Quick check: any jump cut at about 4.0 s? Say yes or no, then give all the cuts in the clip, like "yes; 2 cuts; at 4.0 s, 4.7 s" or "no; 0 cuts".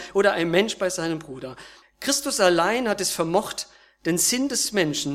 no; 1 cut; at 1.8 s